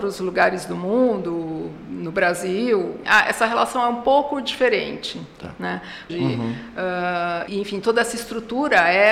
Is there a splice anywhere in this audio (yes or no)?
yes